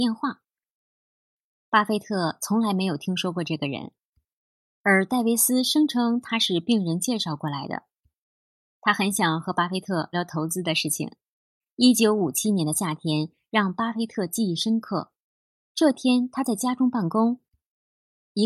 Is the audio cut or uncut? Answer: cut